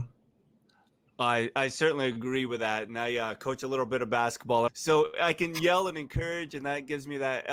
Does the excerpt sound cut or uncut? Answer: cut